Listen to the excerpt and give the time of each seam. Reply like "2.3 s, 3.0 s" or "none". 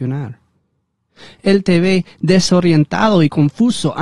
none